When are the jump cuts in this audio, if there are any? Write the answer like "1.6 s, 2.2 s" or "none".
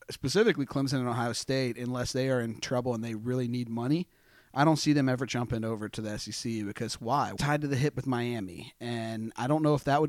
7.4 s